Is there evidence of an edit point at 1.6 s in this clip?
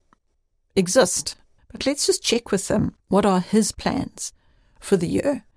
yes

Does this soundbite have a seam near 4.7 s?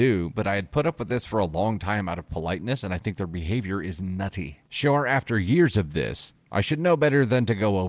yes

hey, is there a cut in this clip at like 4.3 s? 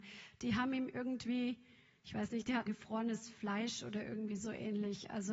no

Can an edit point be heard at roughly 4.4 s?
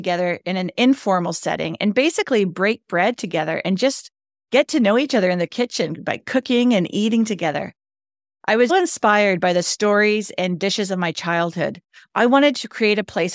no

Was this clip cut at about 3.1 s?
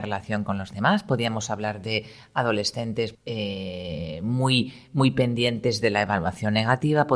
yes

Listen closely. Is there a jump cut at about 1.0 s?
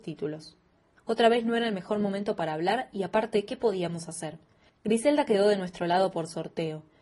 yes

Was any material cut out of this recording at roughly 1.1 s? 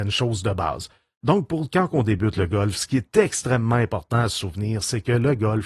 no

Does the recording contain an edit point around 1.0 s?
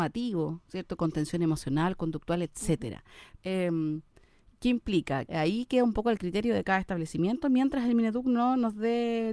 no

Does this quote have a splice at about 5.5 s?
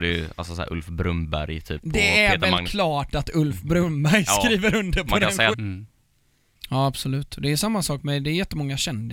yes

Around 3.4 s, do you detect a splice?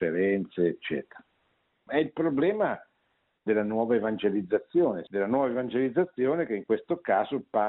no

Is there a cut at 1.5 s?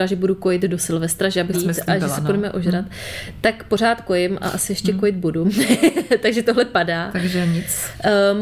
yes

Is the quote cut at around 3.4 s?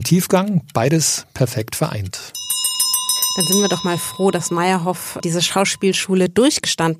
no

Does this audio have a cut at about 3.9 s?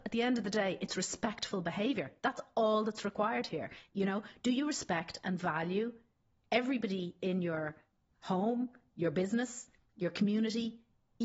yes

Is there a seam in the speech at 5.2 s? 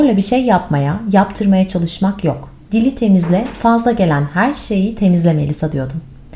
no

